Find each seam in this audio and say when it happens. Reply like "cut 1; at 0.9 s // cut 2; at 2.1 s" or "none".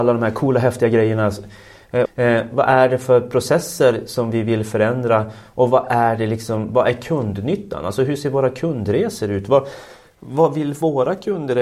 cut 1; at 2.0 s